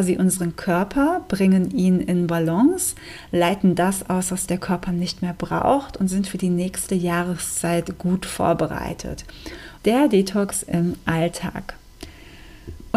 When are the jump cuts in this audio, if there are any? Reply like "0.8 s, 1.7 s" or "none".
9.8 s